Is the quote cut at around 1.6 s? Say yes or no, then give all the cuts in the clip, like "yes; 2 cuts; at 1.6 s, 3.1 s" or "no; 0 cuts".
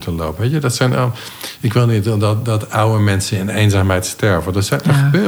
no; 0 cuts